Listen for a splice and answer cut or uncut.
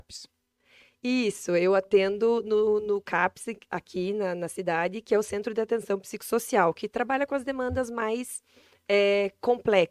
uncut